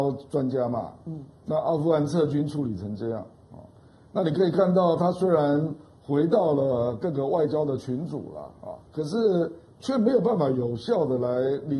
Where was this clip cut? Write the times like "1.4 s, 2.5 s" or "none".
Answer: 8.9 s